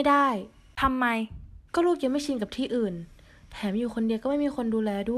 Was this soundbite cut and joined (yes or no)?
yes